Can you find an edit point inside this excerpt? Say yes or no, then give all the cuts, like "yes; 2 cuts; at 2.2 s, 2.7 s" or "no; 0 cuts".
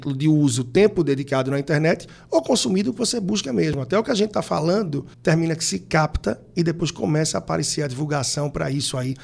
yes; 1 cut; at 5.1 s